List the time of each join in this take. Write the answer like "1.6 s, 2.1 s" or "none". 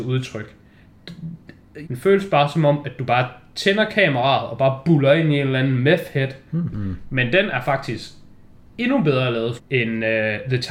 1.8 s, 6.7 s, 9.6 s